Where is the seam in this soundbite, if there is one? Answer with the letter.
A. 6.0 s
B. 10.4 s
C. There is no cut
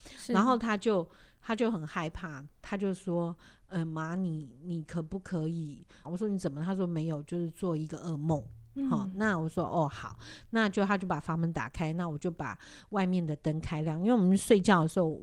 A